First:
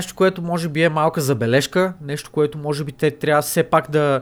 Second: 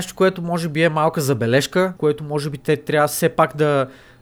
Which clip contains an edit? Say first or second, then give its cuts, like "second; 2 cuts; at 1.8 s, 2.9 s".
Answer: second; 1 cut; at 2.0 s